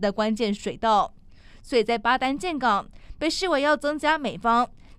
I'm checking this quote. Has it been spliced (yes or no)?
no